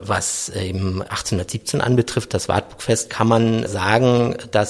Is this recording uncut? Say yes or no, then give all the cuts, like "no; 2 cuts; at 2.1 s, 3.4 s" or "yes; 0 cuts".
no; 1 cut; at 3.7 s